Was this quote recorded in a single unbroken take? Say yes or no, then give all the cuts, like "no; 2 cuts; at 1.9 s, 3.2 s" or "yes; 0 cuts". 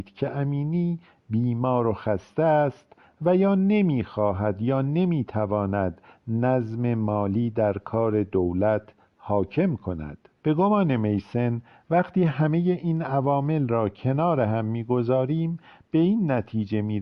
no; 1 cut; at 10.4 s